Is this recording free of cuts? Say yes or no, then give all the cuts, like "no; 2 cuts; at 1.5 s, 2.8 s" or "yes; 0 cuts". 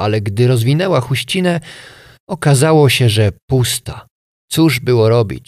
no; 1 cut; at 4.4 s